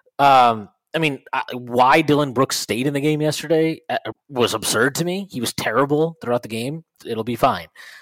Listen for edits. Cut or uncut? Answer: cut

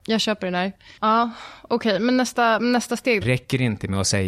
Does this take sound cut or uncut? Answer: cut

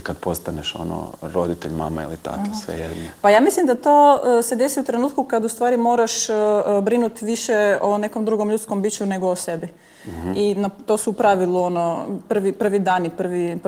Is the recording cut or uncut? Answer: uncut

